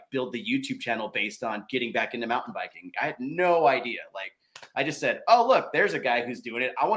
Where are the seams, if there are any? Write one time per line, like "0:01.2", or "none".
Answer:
0:02.9